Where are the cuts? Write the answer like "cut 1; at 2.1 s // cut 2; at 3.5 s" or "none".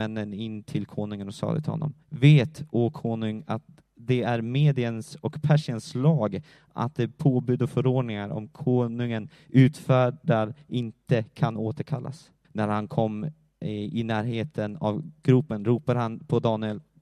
cut 1; at 2.0 s // cut 2; at 12.4 s